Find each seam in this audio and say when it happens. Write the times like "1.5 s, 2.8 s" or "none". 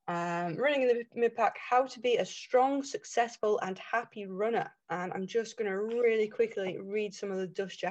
4.8 s